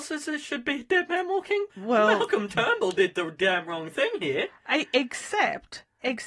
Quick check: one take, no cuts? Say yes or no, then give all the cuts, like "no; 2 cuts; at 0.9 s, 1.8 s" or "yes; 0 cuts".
no; 1 cut; at 1.7 s